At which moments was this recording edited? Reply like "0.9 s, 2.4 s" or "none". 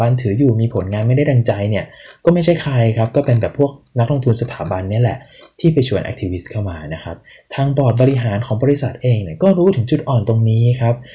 none

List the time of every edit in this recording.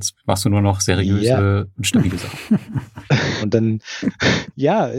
3.4 s

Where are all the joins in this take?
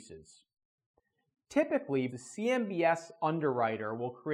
2.1 s

